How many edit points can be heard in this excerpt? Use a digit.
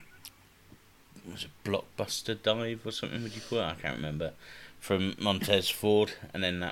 0